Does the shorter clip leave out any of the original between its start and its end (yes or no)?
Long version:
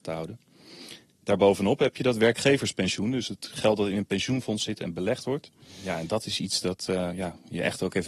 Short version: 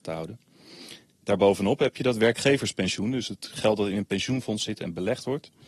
no